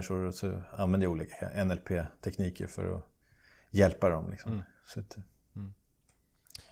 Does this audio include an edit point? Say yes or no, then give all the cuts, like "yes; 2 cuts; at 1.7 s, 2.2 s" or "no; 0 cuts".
no; 0 cuts